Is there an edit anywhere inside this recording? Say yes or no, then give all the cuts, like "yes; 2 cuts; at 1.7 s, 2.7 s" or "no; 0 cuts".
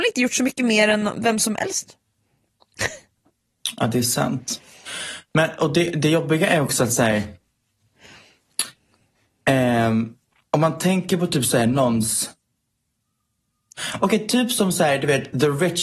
no; 0 cuts